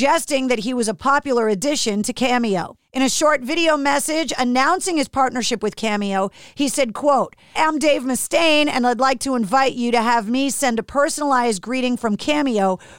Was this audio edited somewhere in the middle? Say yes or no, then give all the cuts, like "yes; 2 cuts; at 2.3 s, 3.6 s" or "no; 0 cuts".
yes; 1 cut; at 7.6 s